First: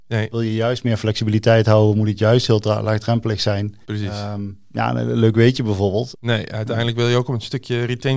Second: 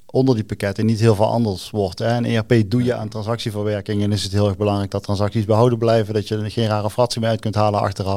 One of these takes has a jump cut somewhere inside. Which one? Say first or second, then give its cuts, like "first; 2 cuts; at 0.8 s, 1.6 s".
first; 2 cuts; at 3.8 s, 6.1 s